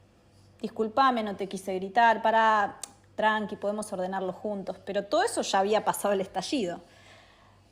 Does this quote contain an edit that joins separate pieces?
no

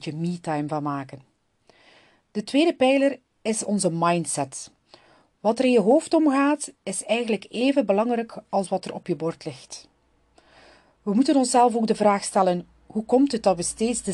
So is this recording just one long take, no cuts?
yes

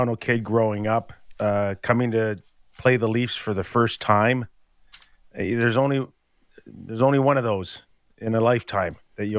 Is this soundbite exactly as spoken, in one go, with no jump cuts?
yes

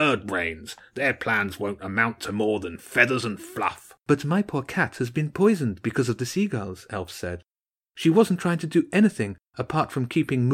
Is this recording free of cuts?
no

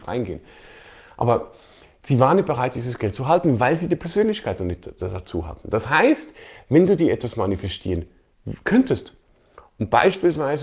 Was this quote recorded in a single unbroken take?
yes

